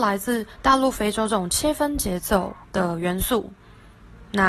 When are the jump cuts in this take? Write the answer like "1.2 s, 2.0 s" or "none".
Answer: 2.6 s